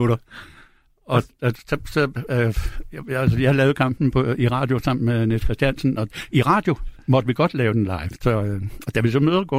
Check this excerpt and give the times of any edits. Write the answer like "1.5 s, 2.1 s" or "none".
8.2 s